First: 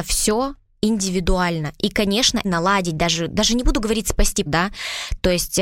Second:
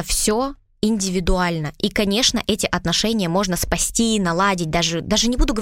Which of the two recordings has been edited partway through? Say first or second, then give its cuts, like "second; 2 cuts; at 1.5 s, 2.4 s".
first; 2 cuts; at 2.4 s, 4.5 s